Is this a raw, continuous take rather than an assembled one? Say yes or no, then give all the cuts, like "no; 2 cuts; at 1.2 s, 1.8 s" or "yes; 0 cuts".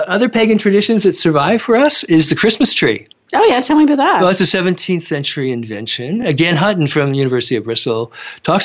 yes; 0 cuts